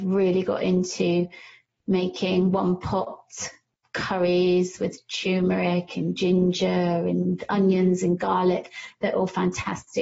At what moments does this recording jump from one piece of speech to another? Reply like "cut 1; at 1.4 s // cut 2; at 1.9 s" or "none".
none